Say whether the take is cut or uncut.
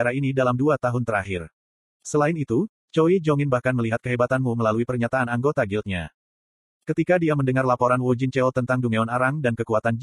cut